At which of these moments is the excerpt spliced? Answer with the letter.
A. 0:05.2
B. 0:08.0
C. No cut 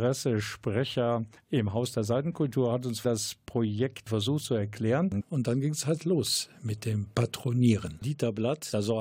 A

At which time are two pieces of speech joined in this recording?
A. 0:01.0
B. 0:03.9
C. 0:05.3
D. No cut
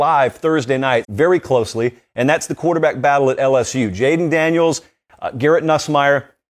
A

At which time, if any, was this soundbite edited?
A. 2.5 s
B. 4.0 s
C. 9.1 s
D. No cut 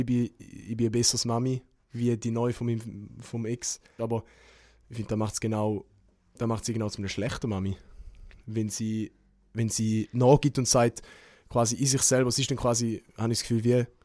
B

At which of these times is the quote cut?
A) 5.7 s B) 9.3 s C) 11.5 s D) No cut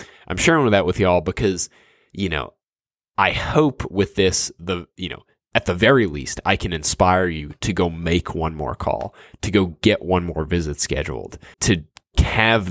C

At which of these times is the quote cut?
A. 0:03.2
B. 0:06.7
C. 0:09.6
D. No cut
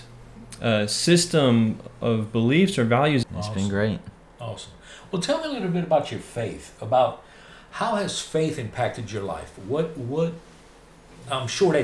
A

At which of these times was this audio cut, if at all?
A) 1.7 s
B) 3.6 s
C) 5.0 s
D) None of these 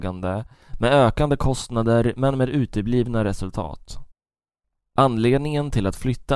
C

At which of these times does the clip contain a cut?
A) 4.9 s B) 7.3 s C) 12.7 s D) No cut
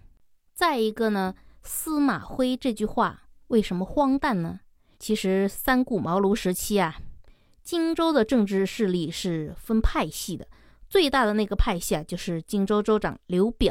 A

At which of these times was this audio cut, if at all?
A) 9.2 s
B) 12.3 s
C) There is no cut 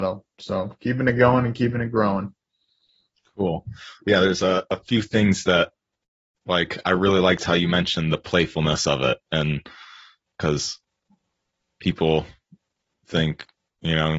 A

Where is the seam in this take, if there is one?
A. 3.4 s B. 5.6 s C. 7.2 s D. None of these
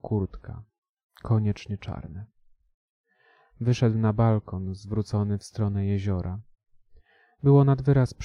D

